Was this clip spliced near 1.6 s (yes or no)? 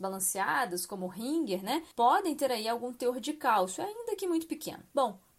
no